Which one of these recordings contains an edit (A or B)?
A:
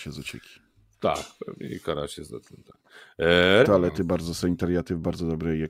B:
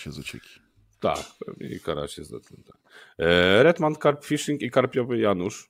A